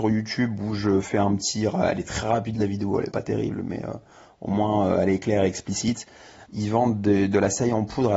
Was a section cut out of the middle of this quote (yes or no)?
yes